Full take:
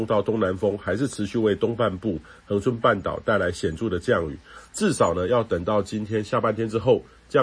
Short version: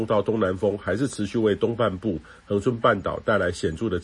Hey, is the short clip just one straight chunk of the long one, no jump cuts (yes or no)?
yes